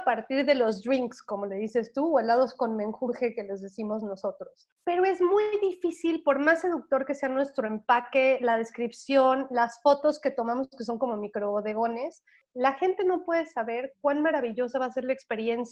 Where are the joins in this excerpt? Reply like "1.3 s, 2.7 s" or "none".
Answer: none